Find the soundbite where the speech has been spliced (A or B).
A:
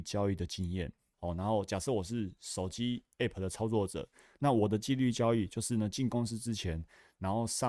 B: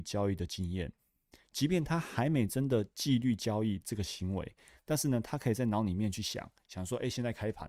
A